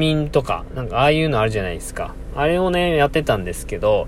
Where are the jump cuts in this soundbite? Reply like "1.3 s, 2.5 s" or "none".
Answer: none